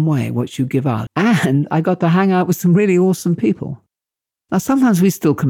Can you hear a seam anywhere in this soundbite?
yes; 1 cut; at 1.1 s

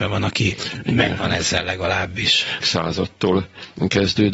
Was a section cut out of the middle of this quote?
yes; 1 cut; at 2.6 s

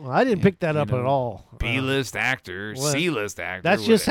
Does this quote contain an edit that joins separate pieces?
no; 0 cuts

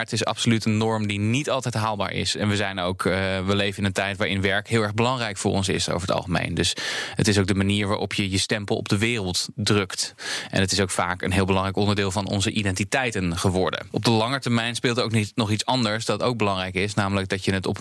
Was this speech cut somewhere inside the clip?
yes; 1 cut; at 2.3 s

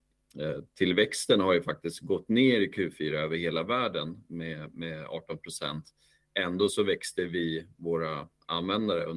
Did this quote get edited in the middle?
no; 0 cuts

